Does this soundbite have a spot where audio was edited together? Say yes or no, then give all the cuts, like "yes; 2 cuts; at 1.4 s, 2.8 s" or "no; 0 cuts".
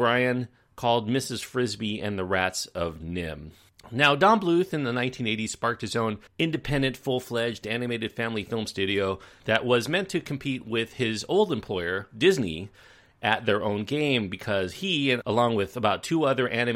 yes; 1 cut; at 6.3 s